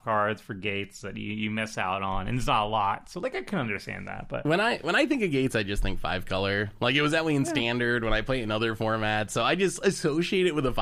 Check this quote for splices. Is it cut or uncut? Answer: uncut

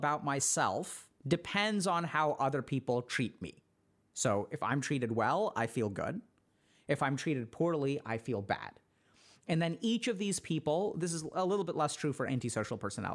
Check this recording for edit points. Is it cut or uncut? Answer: cut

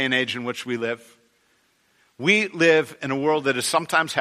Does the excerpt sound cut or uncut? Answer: uncut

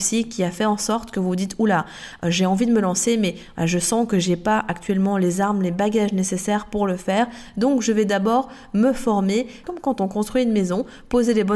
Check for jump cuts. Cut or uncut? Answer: cut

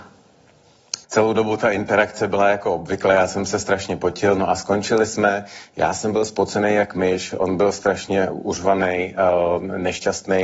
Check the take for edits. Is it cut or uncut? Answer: cut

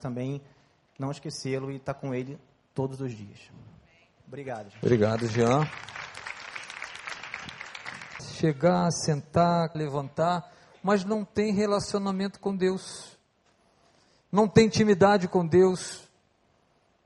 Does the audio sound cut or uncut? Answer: cut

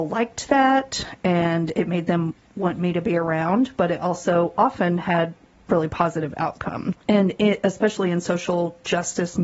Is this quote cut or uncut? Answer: cut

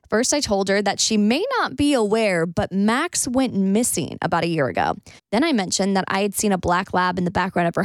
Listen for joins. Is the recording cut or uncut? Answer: cut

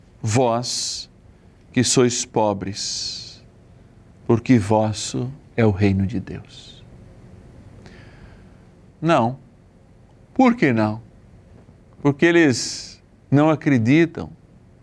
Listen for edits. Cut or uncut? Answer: cut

